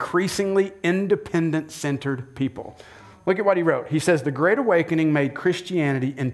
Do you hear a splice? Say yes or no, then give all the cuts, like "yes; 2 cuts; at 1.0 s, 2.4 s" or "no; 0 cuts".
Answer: no; 0 cuts